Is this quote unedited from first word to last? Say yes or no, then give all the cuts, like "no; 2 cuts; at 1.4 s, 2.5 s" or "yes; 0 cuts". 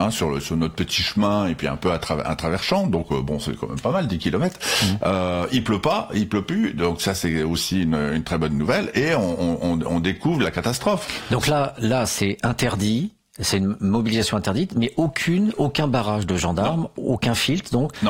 yes; 0 cuts